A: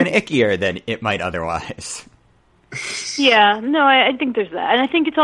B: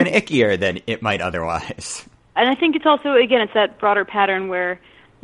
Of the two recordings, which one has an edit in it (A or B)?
B